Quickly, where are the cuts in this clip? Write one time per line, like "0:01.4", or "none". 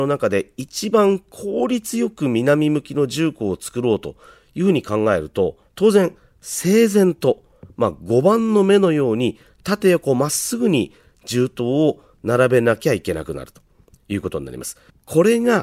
0:05.7